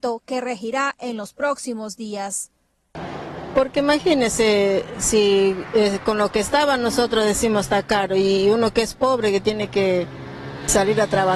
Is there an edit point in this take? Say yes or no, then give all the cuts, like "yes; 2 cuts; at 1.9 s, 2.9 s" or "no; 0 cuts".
no; 0 cuts